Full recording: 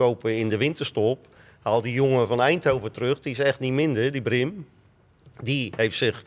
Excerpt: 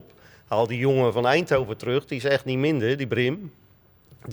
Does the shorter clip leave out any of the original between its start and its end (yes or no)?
no